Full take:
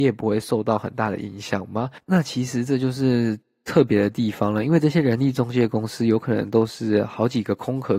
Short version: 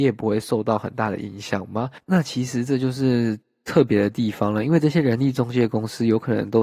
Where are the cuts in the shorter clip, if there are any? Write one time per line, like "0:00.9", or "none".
none